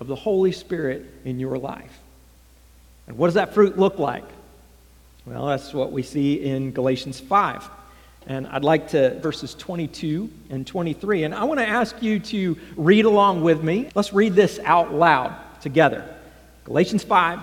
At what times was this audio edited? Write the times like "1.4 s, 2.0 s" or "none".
9.2 s, 13.9 s